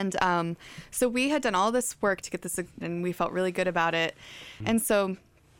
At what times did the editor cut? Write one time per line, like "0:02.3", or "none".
0:02.8
0:04.6